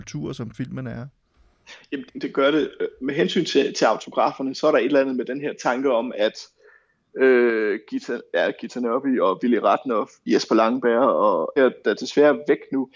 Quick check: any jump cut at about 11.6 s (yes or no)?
yes